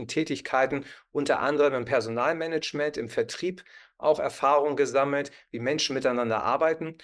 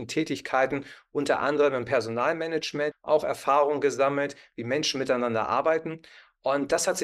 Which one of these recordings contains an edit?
second; 1 cut; at 2.9 s

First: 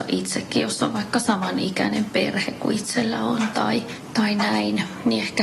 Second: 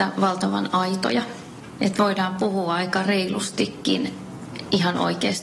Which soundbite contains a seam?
second; 1 cut; at 1.7 s

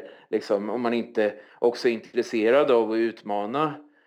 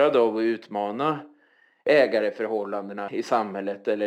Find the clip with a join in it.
second; 1 cut; at 3.1 s

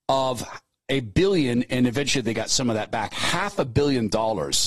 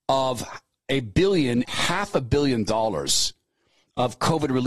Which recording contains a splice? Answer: second; 1 cut; at 1.6 s

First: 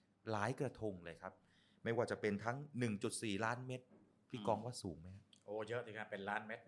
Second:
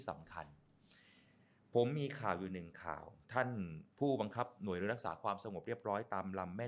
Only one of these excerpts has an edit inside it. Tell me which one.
second; 1 cut; at 3.9 s

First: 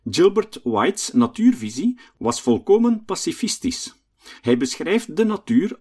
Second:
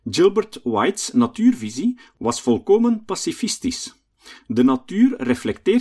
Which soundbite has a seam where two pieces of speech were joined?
first; 1 cut; at 4.4 s

